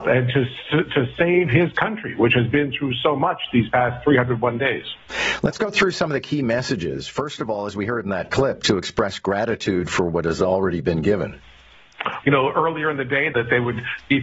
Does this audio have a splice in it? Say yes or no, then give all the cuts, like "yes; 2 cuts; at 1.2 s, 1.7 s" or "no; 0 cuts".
yes; 2 cuts; at 12.2 s, 13.3 s